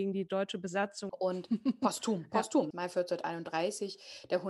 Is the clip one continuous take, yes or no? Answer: no